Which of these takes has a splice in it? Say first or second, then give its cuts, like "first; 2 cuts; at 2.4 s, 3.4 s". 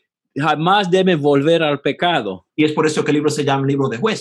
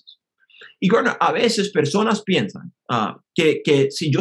first; 1 cut; at 2.5 s